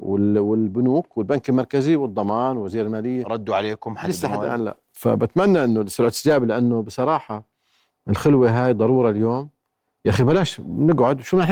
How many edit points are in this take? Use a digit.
0